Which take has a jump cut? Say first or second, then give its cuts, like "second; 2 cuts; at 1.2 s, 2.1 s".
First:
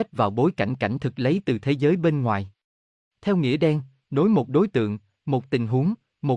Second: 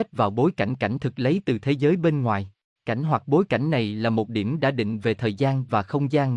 second; 1 cut; at 2.8 s